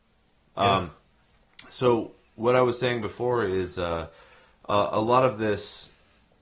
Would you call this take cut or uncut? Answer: uncut